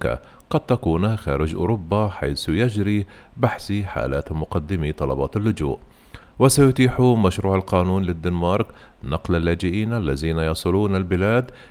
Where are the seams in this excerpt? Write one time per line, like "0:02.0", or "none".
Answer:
0:06.2